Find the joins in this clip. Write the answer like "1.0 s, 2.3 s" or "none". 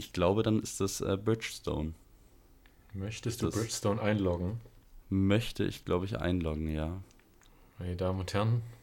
none

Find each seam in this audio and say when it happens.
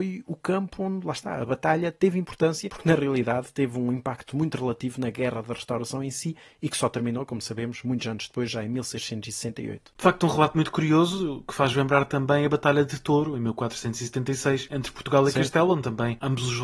none

